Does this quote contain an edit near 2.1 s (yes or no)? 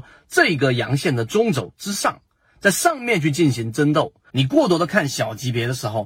no